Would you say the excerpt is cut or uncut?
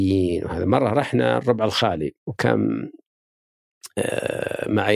cut